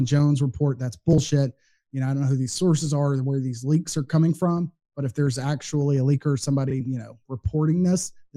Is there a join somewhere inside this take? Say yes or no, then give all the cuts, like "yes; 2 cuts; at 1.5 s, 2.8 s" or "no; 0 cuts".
no; 0 cuts